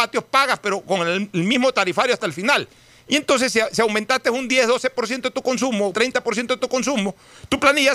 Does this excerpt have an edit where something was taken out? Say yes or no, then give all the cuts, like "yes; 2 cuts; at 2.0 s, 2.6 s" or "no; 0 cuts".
yes; 1 cut; at 5.9 s